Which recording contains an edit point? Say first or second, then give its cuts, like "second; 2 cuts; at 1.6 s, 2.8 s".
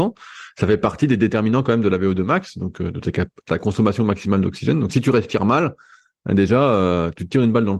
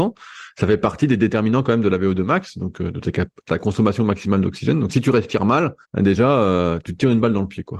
second; 1 cut; at 5.8 s